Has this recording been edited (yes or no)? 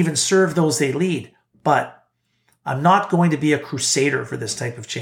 no